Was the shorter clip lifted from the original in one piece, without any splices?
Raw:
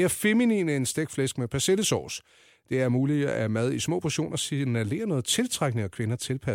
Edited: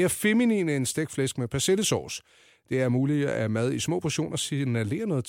yes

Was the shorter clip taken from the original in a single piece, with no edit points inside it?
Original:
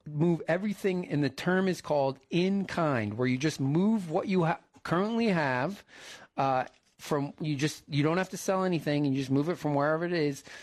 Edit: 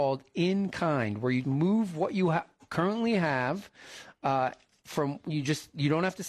no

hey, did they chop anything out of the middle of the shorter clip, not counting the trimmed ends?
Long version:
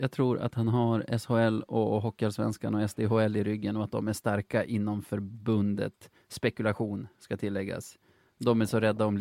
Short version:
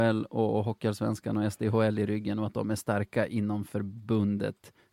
no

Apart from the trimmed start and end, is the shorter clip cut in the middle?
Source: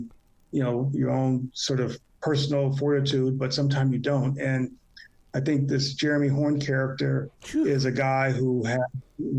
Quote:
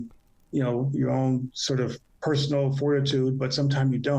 no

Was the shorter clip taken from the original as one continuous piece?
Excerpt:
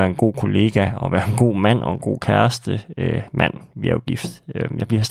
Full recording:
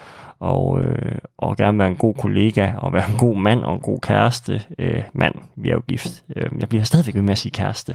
yes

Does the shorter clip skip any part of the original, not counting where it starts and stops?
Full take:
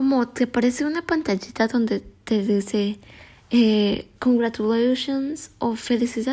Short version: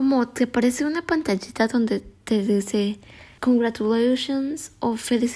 yes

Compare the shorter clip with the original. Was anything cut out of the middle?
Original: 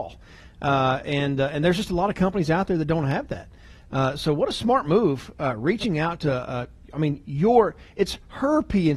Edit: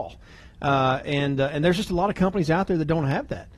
no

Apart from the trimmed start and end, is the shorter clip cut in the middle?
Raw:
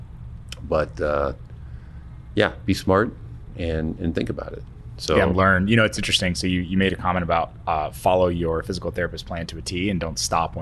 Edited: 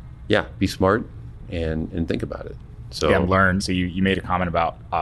yes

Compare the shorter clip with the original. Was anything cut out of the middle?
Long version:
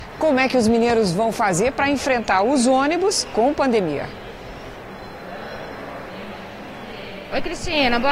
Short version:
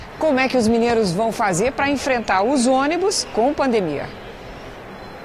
no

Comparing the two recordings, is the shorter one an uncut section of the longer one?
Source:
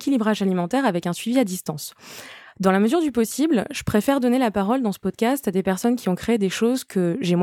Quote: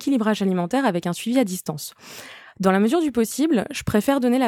yes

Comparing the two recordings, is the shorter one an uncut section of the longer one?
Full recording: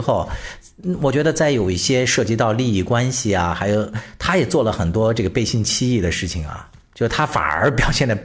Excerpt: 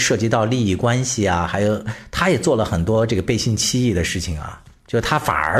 yes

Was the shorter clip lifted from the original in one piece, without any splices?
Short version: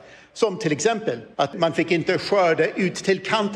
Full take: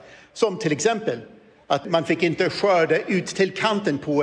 no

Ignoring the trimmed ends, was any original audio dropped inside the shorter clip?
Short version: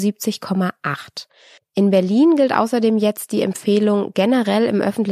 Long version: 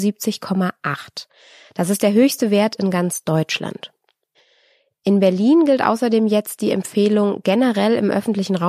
yes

